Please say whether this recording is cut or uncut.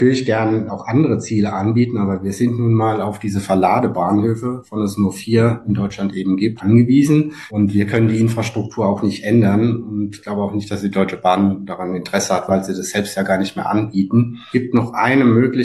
uncut